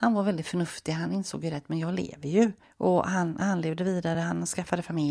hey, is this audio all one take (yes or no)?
yes